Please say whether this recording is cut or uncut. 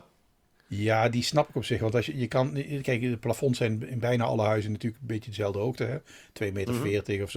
uncut